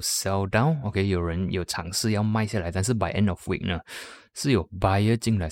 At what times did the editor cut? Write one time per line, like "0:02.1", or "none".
none